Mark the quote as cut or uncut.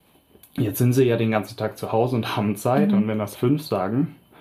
cut